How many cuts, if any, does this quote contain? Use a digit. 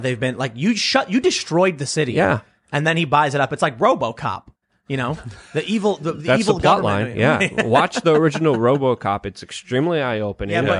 0